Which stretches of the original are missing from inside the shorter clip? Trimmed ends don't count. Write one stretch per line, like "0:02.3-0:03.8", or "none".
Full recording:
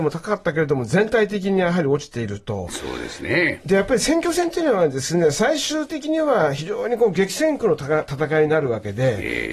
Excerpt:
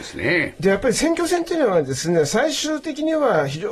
none